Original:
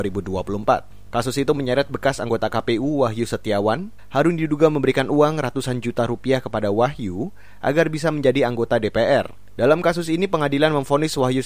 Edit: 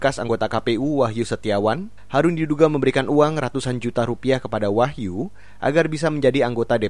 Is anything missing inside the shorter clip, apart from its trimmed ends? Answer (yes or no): no